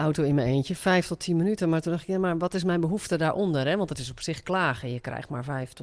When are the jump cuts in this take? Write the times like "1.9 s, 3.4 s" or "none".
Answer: none